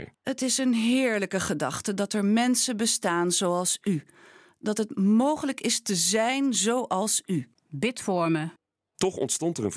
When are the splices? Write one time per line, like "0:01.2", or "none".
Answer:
0:07.6